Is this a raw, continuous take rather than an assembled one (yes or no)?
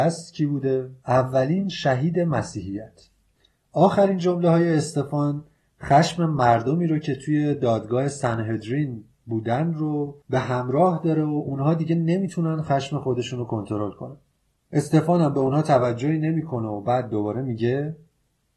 no